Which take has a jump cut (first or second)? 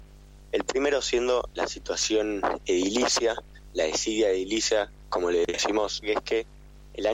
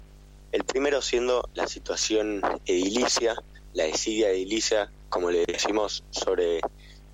first